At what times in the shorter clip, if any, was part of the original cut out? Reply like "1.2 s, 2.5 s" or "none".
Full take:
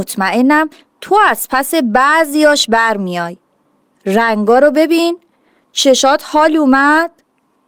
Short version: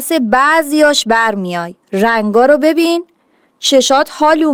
1.8 s